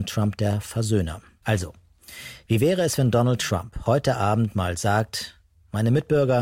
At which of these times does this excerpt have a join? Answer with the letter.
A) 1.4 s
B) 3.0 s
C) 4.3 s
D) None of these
A